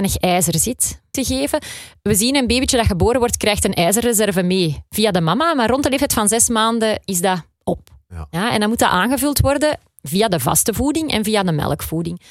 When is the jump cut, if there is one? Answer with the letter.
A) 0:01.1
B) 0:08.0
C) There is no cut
A